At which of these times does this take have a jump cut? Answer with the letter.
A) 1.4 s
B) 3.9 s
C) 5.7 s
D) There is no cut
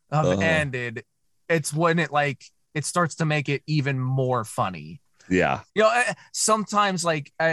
C